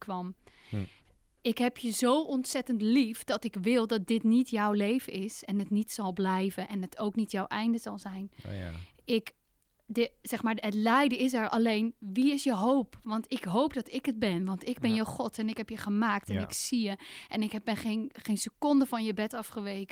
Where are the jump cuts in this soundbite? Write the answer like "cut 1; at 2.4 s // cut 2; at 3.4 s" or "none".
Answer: none